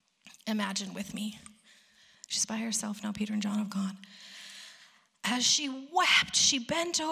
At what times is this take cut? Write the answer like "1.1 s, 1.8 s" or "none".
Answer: 2.1 s